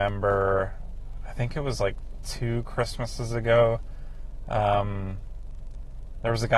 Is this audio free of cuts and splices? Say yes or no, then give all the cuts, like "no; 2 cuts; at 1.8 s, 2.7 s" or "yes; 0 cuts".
yes; 0 cuts